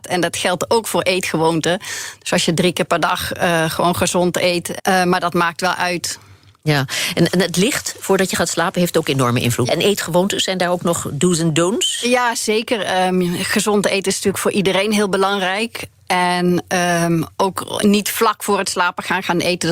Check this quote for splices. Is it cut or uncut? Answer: cut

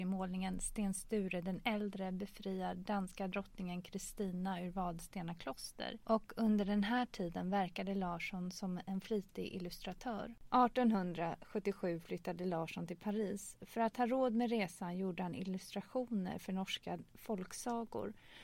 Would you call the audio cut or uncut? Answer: uncut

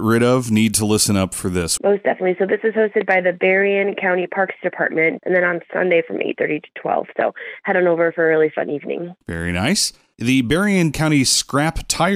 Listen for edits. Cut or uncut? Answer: cut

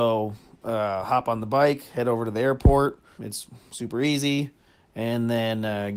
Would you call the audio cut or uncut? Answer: cut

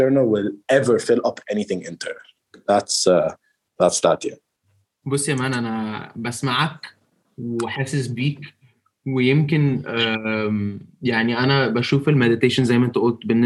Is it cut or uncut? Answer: uncut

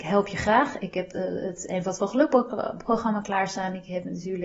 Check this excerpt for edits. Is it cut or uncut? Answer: cut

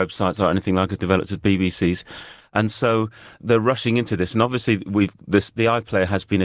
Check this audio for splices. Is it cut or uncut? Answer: uncut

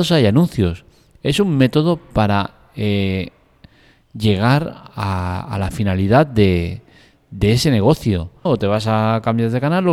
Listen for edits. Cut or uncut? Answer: cut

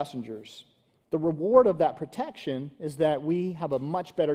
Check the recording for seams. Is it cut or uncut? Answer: cut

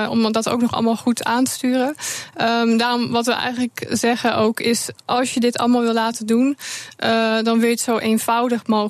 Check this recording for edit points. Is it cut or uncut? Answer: uncut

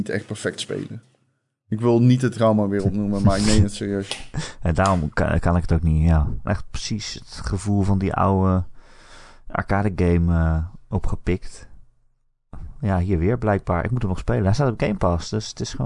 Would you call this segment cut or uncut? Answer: cut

